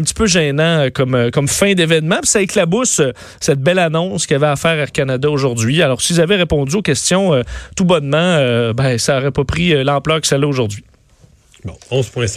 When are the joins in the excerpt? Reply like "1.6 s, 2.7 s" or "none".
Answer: none